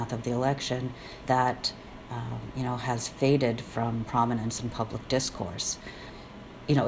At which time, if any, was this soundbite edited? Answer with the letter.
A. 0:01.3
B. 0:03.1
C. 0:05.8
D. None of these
A